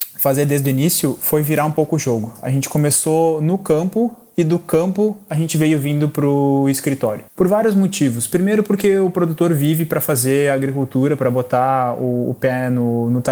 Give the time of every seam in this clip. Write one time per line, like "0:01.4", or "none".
0:07.3